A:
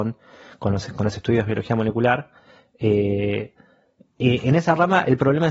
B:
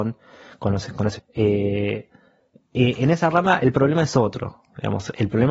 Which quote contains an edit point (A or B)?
B